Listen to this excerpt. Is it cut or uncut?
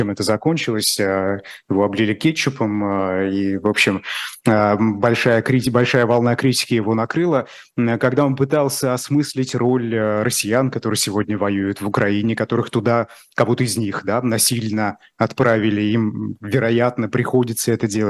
uncut